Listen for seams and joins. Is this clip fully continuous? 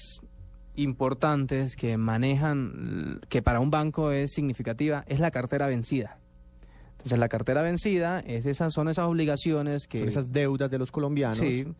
yes; 0 cuts

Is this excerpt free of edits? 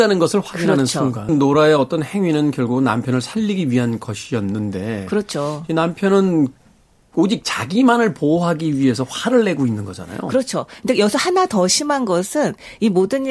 no; 1 cut; at 1.3 s

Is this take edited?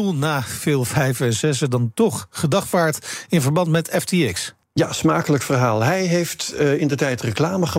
yes; 1 cut; at 4.6 s

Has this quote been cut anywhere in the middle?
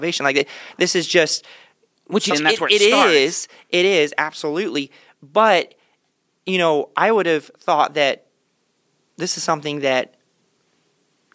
yes; 1 cut; at 2.3 s

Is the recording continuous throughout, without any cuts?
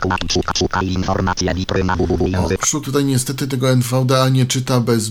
no; 1 cut; at 2.8 s

